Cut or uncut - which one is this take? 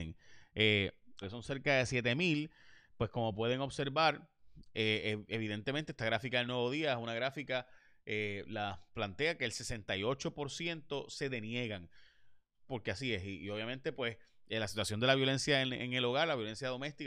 cut